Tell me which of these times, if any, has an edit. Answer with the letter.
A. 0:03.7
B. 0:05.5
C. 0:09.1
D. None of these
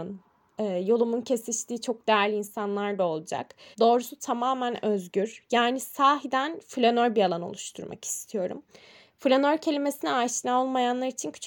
A